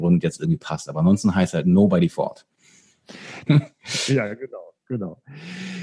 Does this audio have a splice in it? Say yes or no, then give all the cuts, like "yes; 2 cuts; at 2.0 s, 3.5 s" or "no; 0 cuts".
yes; 1 cut; at 3.5 s